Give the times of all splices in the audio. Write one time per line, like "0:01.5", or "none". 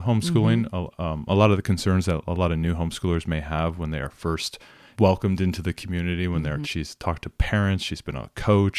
0:04.9
0:06.6

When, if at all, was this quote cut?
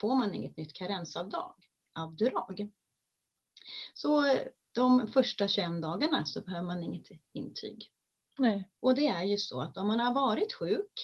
0:03.9
0:08.8

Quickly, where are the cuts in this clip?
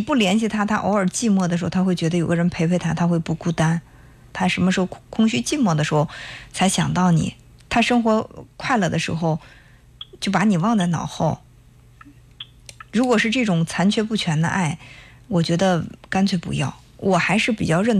0:04.3

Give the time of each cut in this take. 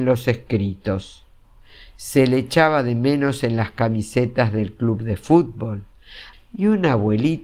0:06.3

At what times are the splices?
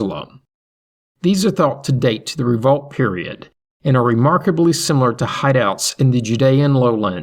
0:01.0

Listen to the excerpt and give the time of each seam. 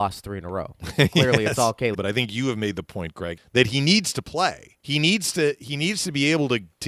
0:01.9
0:03.4
0:04.8

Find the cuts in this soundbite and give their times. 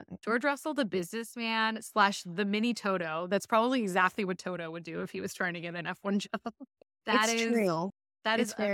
none

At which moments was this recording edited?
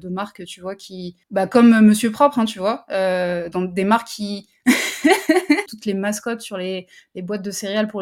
0:01.2
0:03.5
0:05.7

